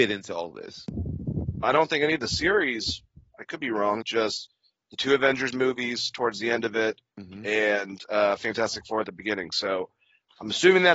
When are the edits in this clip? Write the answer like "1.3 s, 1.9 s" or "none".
1.6 s, 4.0 s, 7.1 s